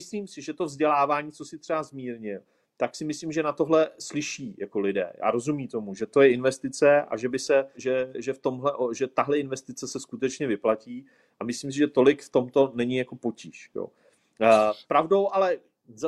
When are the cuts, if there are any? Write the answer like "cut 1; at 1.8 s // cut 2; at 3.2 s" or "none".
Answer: cut 1; at 7.7 s

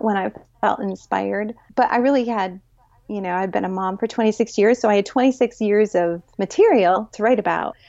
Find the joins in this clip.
cut 1; at 6.3 s

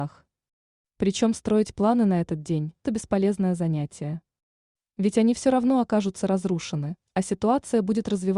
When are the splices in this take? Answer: cut 1; at 2.8 s

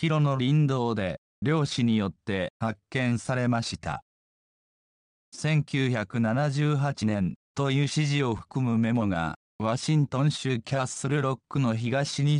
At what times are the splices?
cut 1; at 5.2 s // cut 2; at 7.4 s

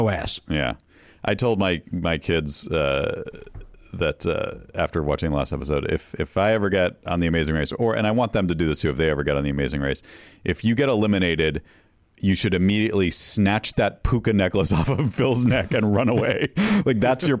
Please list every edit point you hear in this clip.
none

